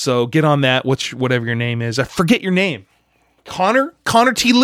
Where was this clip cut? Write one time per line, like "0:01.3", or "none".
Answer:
none